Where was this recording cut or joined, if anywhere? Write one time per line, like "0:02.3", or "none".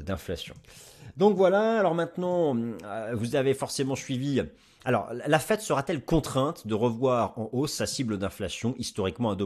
none